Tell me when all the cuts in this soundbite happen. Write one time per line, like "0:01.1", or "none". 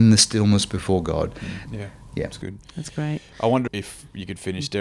0:01.7
0:03.7